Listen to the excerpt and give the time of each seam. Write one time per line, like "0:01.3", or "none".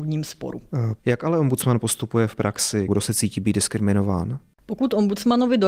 0:01.0
0:02.9